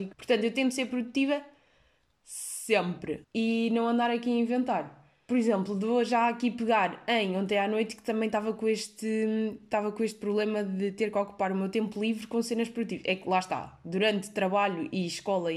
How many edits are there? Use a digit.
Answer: 1